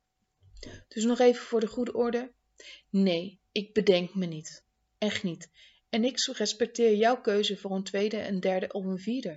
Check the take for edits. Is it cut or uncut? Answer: uncut